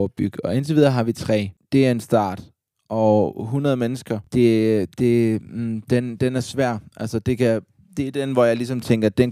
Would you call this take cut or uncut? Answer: uncut